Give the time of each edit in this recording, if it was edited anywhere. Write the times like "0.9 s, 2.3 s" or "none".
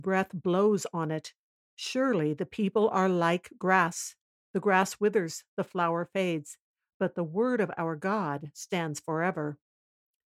none

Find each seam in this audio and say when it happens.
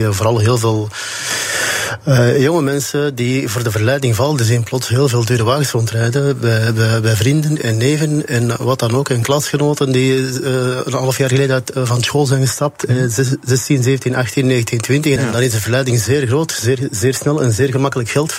15.2 s

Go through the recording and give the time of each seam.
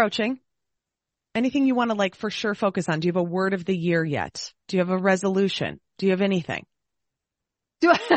none

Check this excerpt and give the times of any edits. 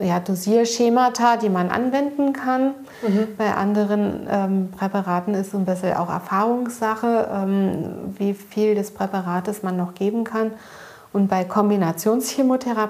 none

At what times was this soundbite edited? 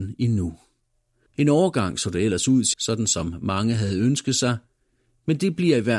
1.3 s, 2.7 s

